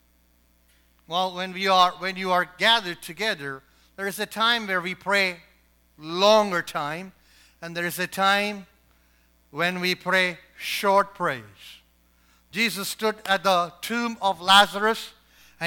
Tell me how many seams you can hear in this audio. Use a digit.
0